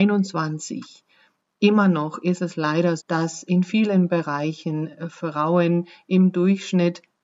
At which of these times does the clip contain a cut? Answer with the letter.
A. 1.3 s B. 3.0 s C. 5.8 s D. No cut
B